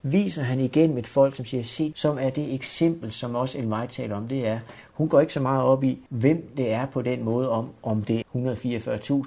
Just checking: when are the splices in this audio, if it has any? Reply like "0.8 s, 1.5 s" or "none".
1.9 s, 6.1 s, 8.2 s